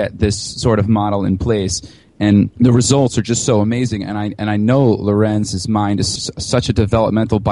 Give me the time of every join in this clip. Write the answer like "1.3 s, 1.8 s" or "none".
2.5 s, 6.2 s